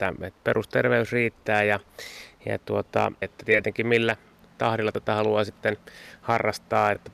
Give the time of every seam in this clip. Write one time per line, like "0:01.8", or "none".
0:03.2